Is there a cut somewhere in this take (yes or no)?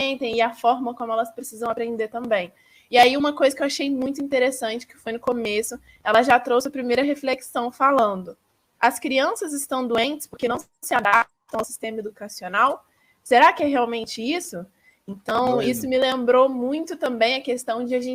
no